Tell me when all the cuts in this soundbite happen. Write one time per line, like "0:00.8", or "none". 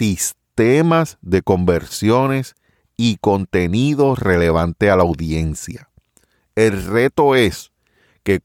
none